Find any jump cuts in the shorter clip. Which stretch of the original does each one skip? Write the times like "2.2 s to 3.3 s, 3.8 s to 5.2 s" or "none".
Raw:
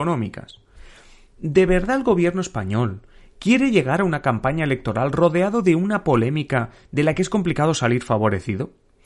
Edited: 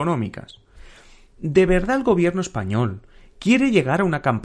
none